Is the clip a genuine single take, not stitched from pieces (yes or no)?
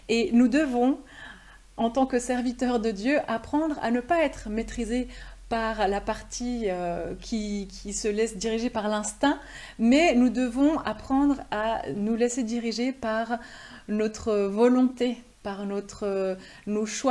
yes